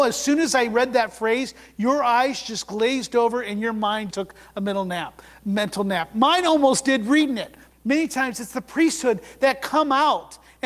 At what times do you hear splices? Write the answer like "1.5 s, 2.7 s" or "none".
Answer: 4.1 s, 7.7 s